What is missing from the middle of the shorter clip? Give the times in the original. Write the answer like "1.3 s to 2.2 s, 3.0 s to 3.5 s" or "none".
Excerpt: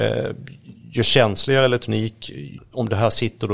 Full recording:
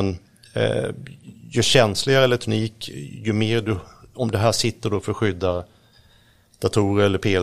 3.2 s to 4.0 s